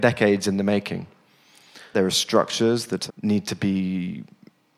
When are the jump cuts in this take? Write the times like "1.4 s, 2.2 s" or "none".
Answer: 1.9 s, 3.1 s